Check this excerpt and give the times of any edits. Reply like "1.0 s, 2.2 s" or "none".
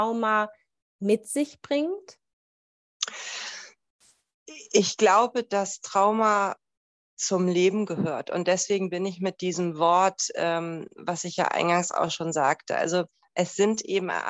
none